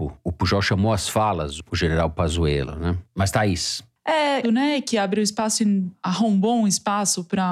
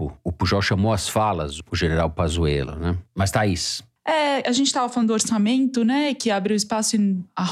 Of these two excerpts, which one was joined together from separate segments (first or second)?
first